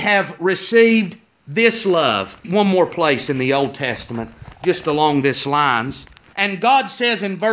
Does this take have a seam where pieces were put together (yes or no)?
yes